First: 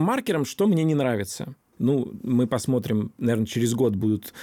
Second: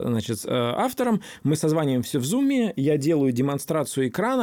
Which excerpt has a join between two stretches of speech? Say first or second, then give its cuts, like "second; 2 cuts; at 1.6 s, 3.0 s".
first; 1 cut; at 1.7 s